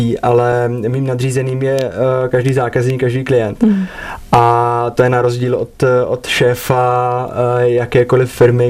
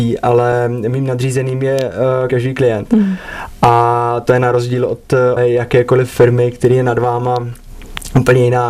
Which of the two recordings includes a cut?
second; 2 cuts; at 2.3 s, 5.4 s

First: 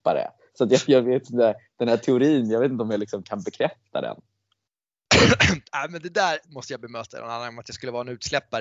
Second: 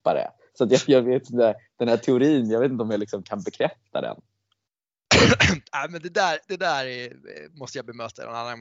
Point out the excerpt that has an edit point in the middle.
first; 1 cut; at 6.4 s

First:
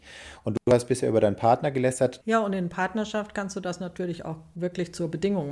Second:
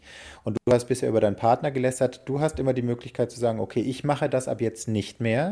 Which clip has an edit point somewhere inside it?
first; 1 cut; at 2.2 s

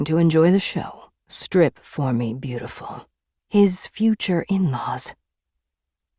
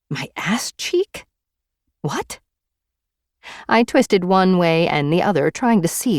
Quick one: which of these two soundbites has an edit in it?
first; 2 cuts; at 1.2 s, 3.4 s

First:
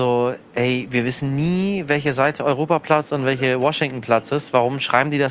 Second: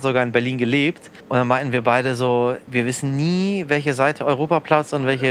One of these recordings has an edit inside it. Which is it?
second; 2 cuts; at 1.2 s, 2.7 s

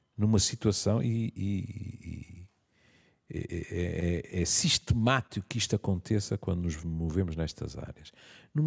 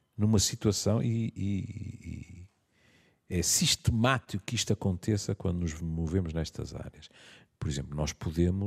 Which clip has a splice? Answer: second; 2 cuts; at 3.3 s, 7.5 s

